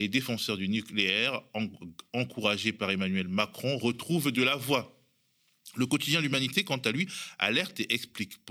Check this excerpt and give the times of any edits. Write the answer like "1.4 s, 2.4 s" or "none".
none